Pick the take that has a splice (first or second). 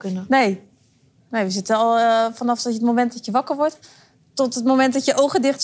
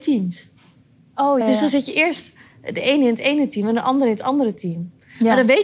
second